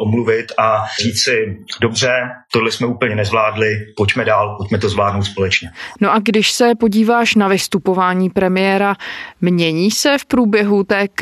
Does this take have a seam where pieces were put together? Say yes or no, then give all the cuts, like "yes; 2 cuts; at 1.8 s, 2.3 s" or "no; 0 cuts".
no; 0 cuts